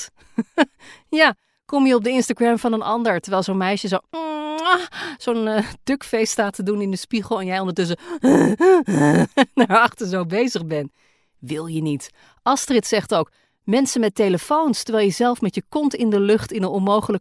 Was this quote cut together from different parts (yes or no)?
no